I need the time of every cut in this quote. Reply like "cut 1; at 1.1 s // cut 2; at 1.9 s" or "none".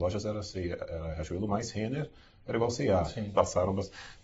cut 1; at 3.3 s